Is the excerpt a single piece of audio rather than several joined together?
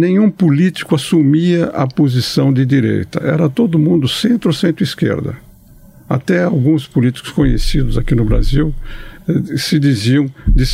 yes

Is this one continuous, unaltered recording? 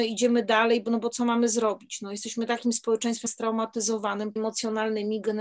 no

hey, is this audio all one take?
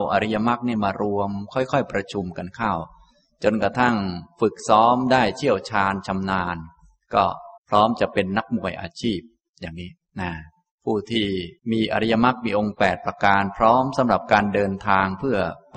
no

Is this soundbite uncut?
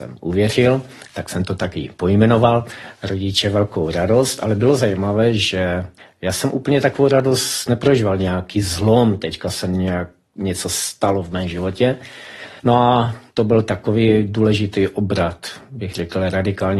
no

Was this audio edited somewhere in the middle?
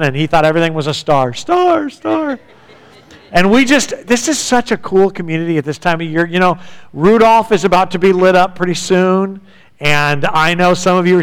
no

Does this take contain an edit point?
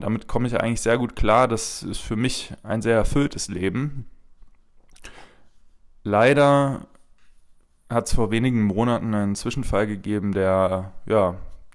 no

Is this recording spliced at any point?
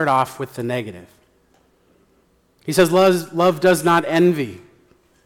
no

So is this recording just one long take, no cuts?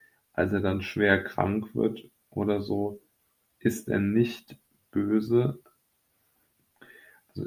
yes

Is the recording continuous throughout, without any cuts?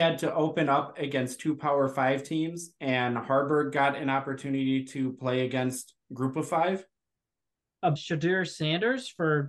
no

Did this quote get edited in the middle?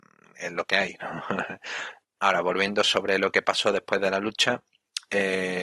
yes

